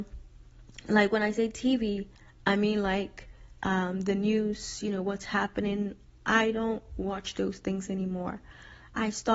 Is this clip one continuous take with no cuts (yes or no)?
yes